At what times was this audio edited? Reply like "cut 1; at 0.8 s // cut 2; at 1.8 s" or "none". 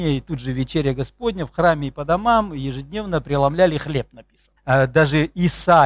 cut 1; at 4.6 s